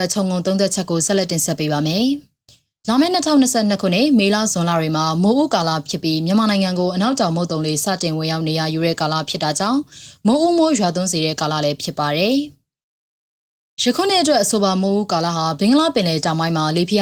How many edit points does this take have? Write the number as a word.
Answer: zero